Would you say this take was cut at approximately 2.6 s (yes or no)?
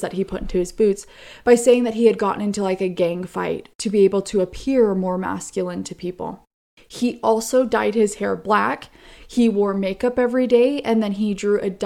no